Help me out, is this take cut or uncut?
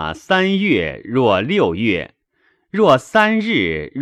uncut